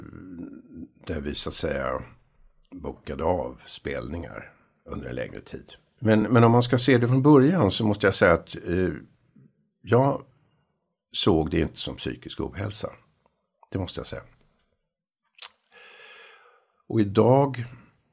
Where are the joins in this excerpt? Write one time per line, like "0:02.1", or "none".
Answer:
none